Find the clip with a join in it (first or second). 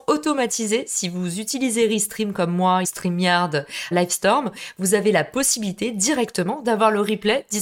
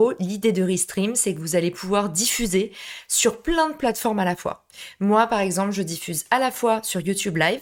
first